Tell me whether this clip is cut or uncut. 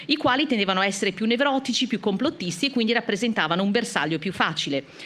uncut